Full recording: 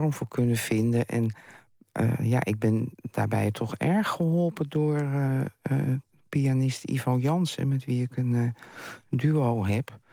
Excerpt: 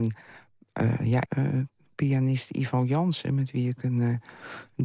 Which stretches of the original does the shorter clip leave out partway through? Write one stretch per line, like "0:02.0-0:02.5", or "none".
0:02.5-0:05.6